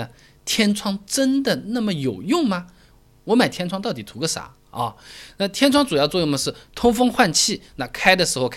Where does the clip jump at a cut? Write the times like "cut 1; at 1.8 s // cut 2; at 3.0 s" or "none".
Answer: none